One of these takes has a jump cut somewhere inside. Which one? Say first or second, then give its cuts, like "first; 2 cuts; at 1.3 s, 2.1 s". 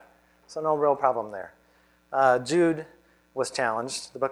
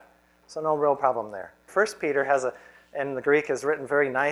second; 1 cut; at 1.7 s